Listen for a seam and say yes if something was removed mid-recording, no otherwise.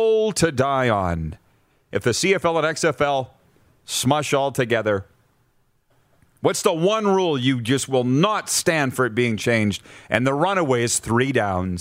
no